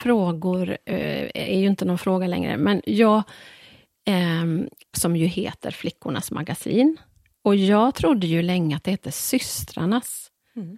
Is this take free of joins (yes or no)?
no